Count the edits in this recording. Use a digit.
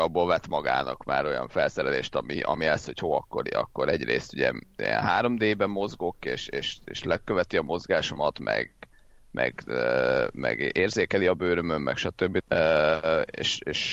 1